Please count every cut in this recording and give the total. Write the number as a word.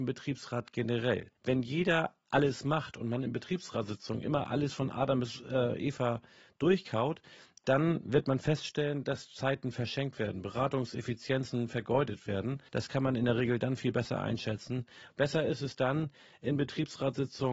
two